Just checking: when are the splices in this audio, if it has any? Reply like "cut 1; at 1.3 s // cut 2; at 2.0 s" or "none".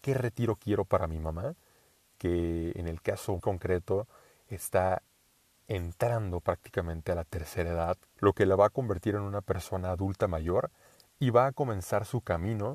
cut 1; at 3.4 s // cut 2; at 8.2 s